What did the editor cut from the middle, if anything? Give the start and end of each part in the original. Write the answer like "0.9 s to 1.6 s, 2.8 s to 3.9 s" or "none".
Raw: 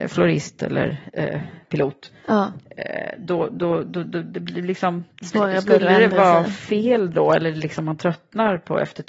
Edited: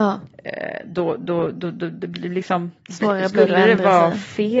none

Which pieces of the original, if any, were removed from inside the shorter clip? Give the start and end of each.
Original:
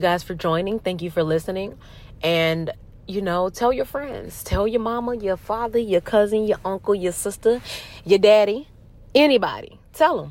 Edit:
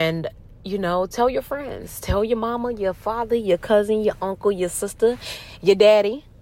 none

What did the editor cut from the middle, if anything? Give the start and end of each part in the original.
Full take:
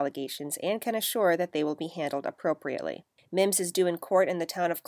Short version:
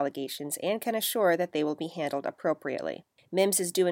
none

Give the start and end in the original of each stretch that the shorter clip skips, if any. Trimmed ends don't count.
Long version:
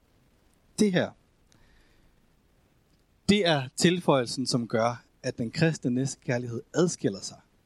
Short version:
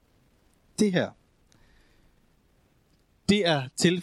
none

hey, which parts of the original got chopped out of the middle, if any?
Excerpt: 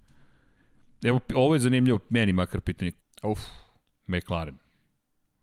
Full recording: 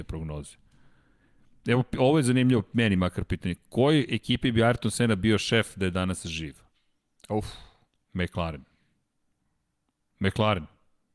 3.6 s to 7.1 s

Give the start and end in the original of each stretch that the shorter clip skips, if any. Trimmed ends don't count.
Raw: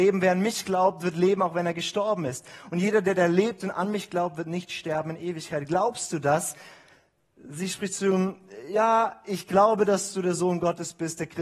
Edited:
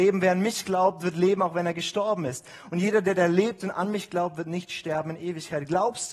none

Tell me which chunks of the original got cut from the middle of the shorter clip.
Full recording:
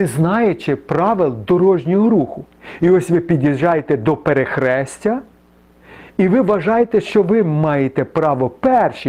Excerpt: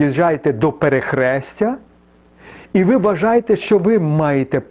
none

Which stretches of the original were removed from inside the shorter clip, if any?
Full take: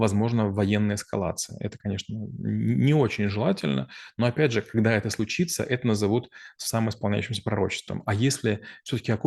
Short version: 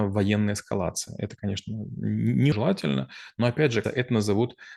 2.9 s to 3.3 s, 4.6 s to 5.6 s

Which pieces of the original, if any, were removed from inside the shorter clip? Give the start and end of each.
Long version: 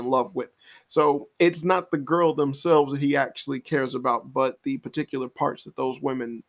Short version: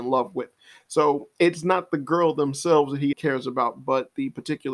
3.1 s to 3.6 s

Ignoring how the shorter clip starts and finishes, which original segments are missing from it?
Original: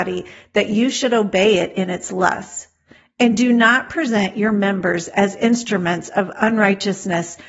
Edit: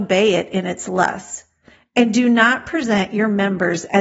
none

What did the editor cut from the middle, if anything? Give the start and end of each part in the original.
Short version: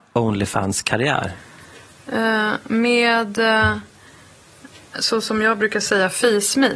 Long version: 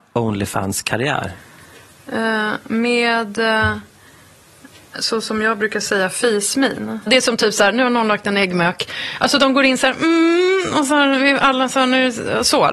none

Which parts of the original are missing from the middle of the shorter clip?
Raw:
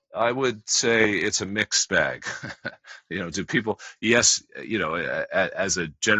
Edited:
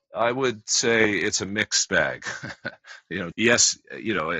3.3 s to 4.0 s

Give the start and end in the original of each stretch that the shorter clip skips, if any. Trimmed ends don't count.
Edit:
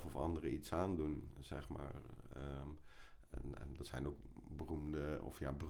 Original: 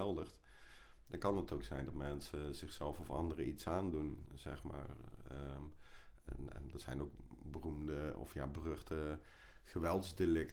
none

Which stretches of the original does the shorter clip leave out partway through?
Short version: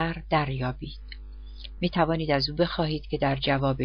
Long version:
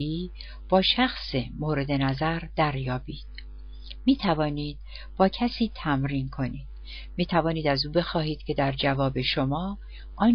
4.0 s to 7.1 s

